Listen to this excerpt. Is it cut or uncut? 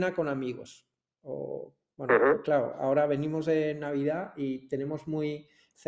uncut